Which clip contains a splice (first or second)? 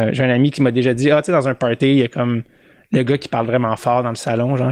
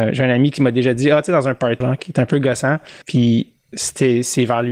second